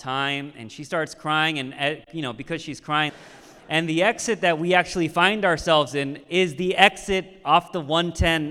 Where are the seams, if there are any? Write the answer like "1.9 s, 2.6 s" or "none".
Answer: 3.1 s